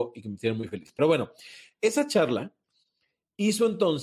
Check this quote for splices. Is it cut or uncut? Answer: uncut